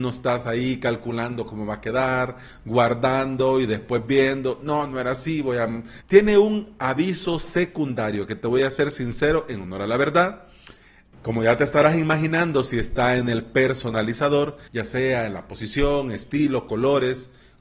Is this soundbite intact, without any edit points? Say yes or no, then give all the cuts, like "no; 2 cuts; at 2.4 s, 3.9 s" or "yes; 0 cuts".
no; 3 cuts; at 6.0 s, 11.1 s, 14.7 s